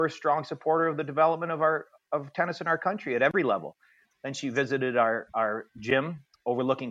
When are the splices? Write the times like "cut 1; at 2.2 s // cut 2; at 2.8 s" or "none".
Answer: cut 1; at 4.1 s